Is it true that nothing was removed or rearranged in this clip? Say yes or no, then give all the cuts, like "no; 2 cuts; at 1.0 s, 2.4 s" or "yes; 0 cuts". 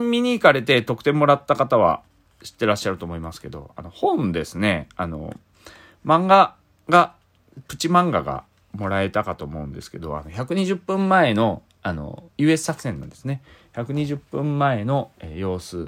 no; 1 cut; at 12.3 s